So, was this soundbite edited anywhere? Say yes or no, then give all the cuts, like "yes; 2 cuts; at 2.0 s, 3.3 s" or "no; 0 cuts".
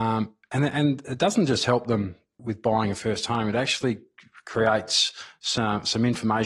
yes; 1 cut; at 2.4 s